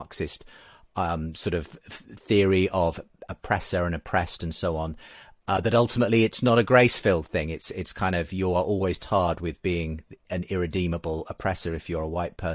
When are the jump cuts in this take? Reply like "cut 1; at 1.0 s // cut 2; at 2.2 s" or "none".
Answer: none